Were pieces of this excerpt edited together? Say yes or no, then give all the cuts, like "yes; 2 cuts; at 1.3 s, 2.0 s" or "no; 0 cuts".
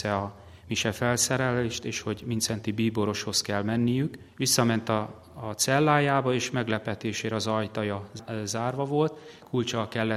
yes; 1 cut; at 4.3 s